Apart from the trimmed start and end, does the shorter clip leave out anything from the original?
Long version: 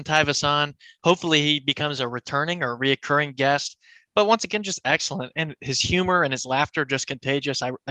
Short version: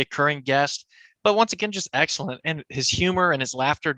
no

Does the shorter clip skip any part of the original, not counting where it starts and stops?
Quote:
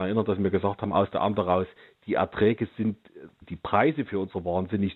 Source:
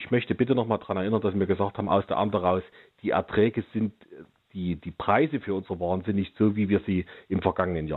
yes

